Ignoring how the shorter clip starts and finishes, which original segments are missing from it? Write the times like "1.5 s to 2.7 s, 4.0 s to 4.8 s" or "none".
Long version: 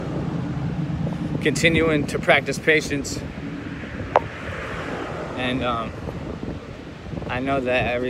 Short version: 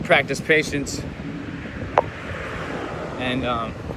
none